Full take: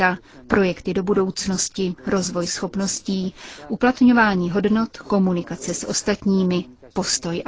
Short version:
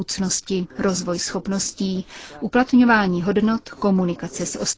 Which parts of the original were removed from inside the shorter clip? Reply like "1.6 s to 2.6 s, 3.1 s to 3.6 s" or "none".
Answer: none